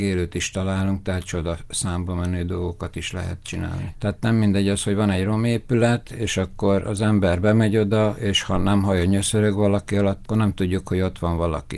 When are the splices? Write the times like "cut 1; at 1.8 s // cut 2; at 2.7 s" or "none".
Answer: cut 1; at 3.9 s // cut 2; at 10.2 s